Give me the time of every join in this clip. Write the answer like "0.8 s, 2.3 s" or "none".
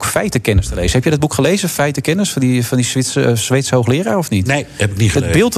none